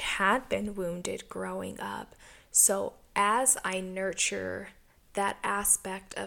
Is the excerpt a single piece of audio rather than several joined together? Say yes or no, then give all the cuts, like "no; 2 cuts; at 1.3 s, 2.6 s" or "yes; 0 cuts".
yes; 0 cuts